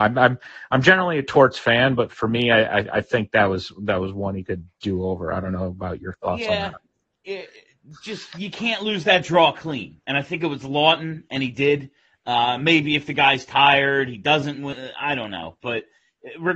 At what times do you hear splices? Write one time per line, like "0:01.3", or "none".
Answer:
none